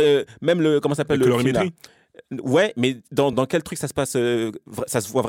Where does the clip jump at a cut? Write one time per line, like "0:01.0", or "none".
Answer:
0:03.3